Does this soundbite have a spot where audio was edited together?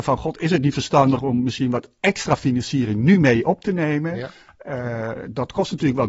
no; 0 cuts

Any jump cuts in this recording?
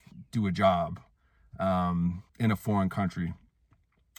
yes; 1 cut; at 2.3 s

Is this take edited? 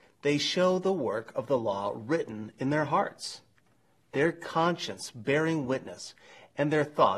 no; 0 cuts

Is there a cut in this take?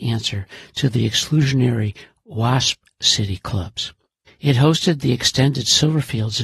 yes; 1 cut; at 4.3 s

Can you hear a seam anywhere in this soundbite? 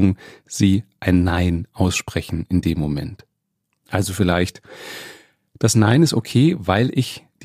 yes; 1 cut; at 3.7 s

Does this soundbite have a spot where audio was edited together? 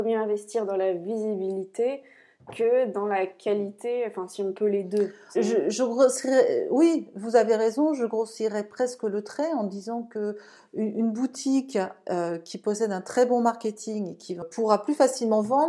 yes; 1 cut; at 5.3 s

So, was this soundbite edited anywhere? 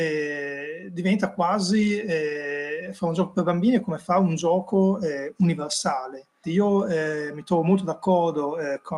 yes; 1 cut; at 6.4 s

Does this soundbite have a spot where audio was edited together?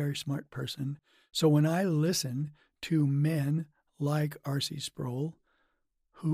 no; 0 cuts

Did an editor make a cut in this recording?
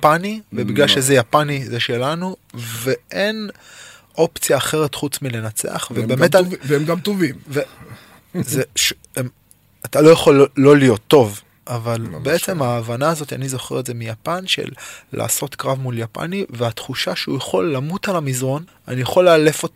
yes; 1 cut; at 18.7 s

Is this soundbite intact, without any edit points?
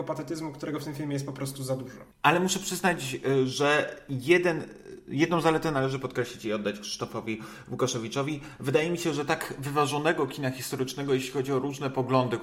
yes; 0 cuts

